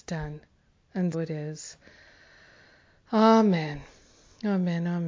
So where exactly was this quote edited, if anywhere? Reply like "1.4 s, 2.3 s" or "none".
1.1 s